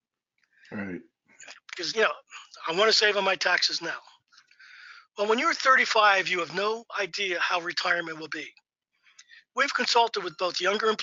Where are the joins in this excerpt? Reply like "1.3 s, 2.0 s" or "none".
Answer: none